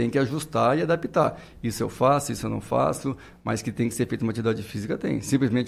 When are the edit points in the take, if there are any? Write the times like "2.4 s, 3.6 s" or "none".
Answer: none